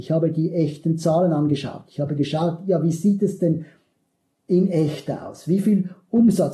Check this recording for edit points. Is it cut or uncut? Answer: uncut